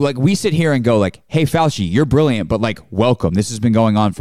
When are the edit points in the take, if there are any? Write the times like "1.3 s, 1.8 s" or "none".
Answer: none